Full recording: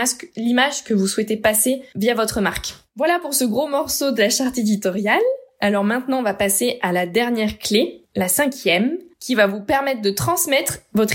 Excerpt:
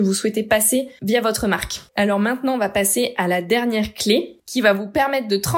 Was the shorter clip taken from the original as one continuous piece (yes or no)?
no